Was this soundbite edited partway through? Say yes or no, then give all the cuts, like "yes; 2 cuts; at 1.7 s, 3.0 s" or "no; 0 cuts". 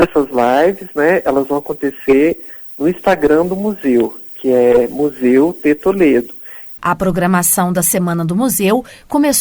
yes; 1 cut; at 6.8 s